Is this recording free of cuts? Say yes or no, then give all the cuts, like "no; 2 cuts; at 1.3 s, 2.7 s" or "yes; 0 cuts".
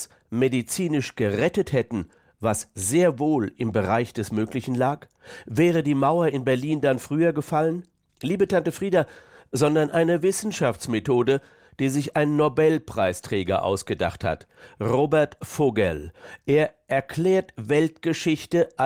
no; 1 cut; at 9.4 s